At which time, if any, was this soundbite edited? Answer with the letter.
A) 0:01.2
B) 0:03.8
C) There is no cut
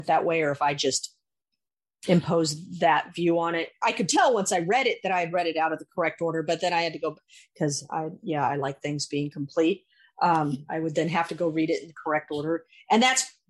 B